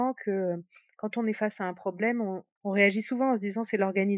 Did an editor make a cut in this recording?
yes; 1 cut; at 2.6 s

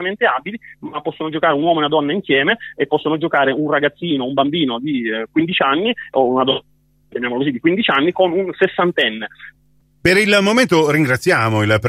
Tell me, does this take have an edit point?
no; 0 cuts

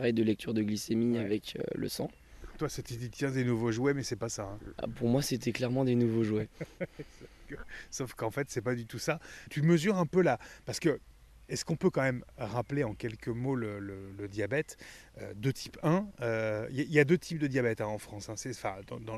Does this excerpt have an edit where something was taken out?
yes; 1 cut; at 9.5 s

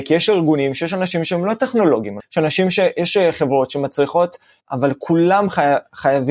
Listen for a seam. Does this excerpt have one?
yes; 2 cuts; at 2.2 s, 4.6 s

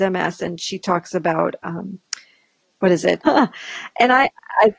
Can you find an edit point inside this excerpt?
yes; 1 cut; at 3.2 s

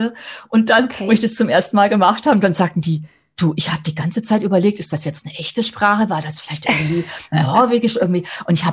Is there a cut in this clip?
no; 0 cuts

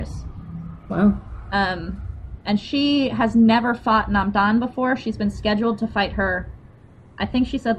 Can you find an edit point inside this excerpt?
no; 0 cuts

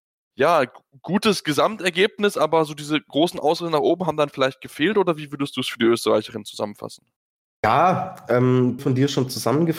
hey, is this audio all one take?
no; 1 cut; at 8.8 s

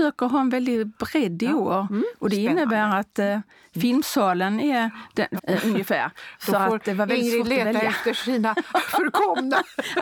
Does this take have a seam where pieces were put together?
yes; 1 cut; at 5.4 s

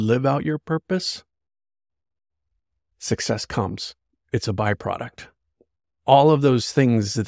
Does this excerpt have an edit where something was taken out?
no; 0 cuts

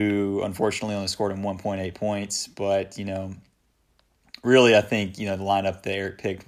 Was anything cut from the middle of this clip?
no; 0 cuts

